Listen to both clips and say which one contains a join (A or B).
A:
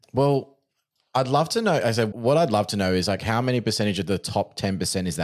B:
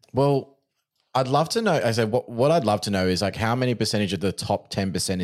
A